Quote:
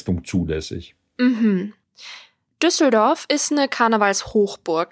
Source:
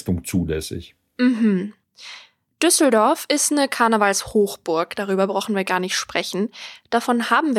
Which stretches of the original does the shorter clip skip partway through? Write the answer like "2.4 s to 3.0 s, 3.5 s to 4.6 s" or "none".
none